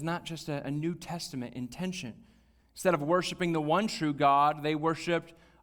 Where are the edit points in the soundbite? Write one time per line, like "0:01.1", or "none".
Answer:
0:02.6